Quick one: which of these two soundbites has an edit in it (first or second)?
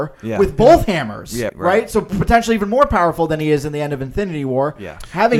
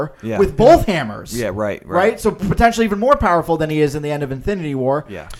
first